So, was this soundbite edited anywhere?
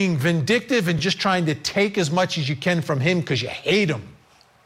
no; 0 cuts

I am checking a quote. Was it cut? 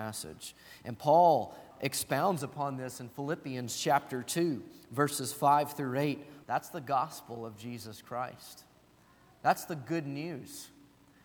yes; 2 cuts; at 1.7 s, 6.4 s

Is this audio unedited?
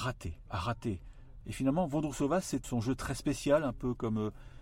no; 2 cuts; at 1.4 s, 2.6 s

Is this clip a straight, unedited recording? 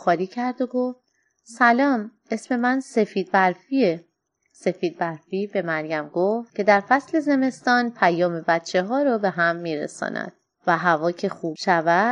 yes; 0 cuts

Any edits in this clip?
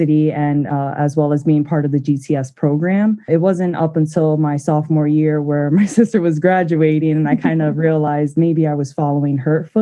no; 0 cuts

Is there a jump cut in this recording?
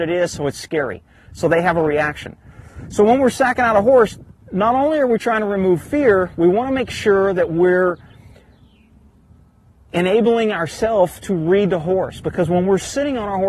no; 0 cuts

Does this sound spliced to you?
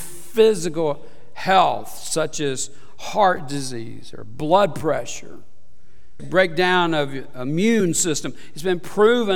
yes; 1 cut; at 6.2 s

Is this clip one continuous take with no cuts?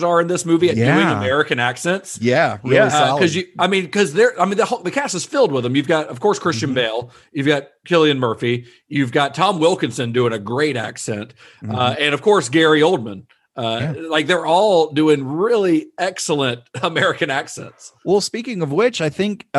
yes; 0 cuts

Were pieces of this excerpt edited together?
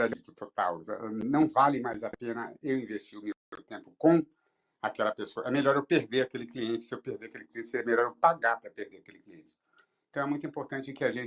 no; 0 cuts

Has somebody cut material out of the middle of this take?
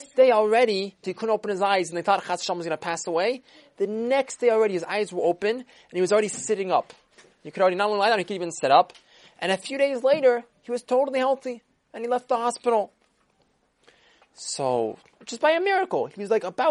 yes; 1 cut; at 1.0 s

